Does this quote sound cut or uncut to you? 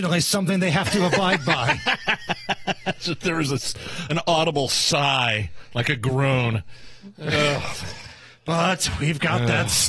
uncut